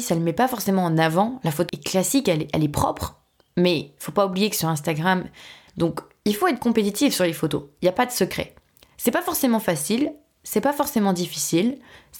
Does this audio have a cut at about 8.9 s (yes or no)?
no